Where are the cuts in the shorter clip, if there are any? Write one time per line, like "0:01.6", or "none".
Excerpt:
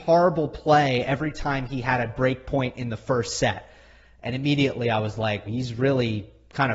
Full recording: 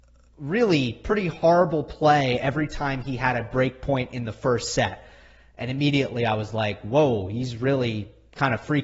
0:05.5